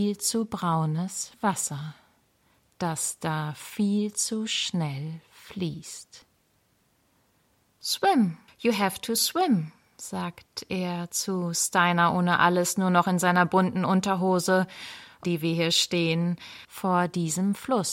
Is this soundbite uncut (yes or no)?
no